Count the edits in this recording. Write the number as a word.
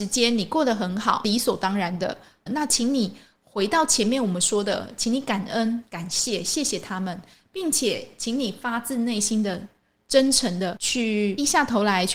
one